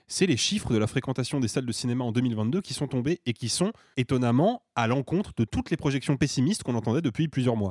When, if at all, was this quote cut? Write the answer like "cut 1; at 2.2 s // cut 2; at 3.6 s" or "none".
cut 1; at 3.9 s

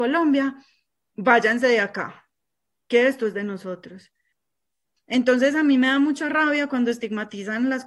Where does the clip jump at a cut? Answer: cut 1; at 5.0 s

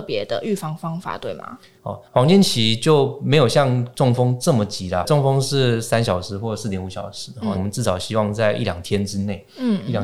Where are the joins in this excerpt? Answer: cut 1; at 1.8 s // cut 2; at 7.6 s

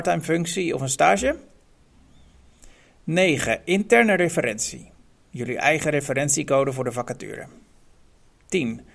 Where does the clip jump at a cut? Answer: none

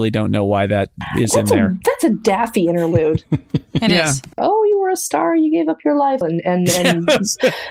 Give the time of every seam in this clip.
cut 1; at 4.4 s // cut 2; at 6.2 s

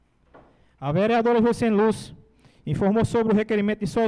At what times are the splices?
none

